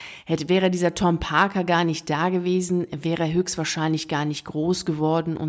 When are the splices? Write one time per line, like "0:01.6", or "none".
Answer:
none